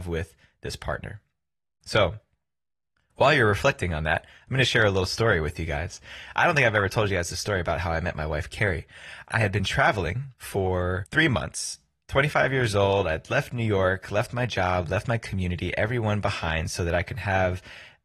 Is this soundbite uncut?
yes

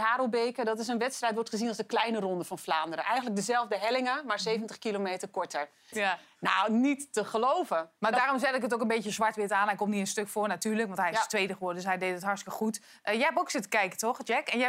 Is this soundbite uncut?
no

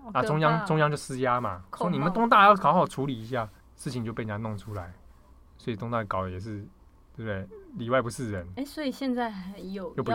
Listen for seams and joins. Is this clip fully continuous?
no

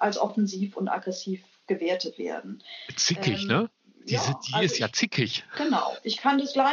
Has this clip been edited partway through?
no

